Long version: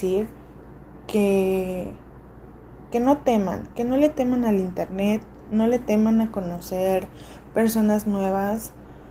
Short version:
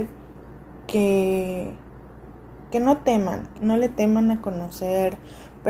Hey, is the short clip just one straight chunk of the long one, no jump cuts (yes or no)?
no